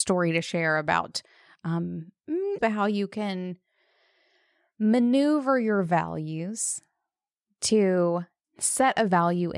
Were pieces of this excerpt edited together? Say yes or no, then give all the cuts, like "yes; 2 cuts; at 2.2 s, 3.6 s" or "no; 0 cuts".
yes; 1 cut; at 2.6 s